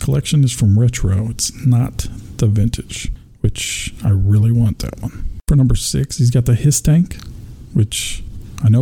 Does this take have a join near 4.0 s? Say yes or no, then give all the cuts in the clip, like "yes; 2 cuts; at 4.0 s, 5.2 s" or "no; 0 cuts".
no; 1 cut; at 5.4 s